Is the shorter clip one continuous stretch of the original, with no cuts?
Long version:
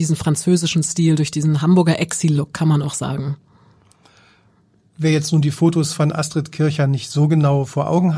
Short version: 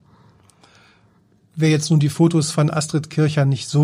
yes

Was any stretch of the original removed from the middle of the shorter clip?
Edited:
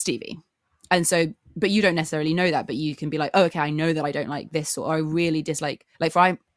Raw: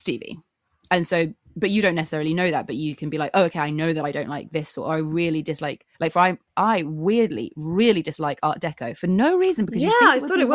no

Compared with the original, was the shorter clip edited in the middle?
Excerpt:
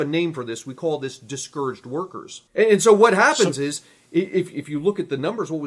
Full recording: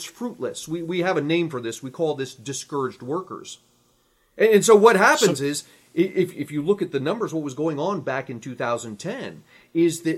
yes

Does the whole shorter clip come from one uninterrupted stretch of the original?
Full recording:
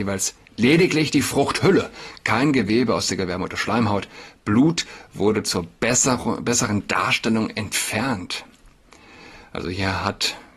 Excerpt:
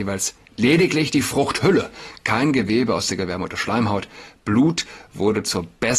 yes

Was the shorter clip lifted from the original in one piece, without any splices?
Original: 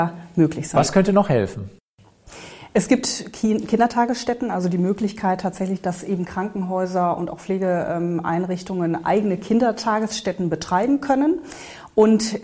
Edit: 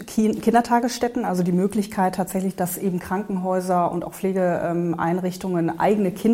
yes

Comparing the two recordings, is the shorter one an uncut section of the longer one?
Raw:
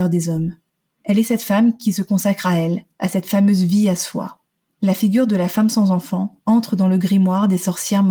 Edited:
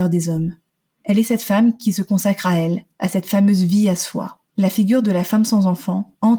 no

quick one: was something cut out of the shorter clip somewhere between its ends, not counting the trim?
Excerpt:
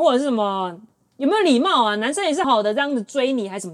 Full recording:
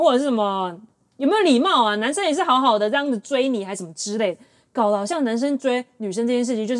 yes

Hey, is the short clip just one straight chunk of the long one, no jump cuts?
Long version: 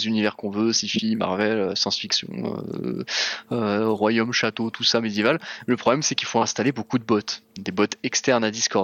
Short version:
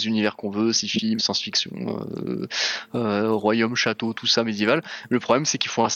no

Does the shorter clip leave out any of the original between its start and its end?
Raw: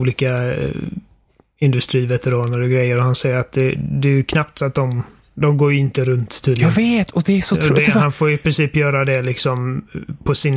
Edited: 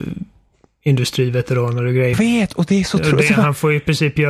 yes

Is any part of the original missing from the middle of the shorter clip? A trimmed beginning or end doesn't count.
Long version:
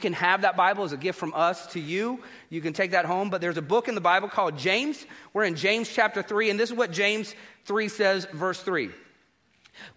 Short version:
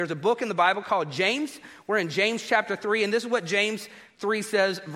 no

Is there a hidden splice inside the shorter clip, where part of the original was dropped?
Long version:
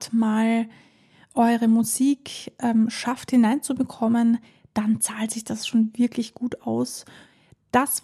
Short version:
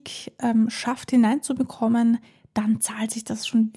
no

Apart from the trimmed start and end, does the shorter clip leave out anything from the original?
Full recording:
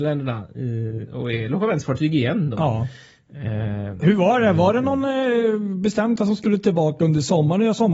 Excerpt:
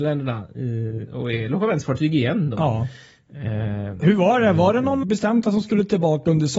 yes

